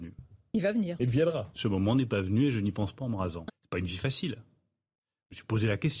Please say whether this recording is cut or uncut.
cut